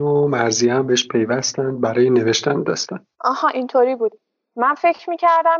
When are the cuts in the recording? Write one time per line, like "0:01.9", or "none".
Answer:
0:03.1